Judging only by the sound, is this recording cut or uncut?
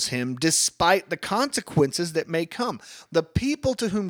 uncut